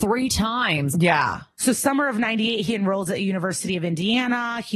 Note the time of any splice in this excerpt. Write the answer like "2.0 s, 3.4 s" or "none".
0.9 s